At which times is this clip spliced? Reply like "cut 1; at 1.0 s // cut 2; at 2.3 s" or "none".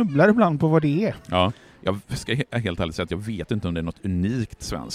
cut 1; at 1.8 s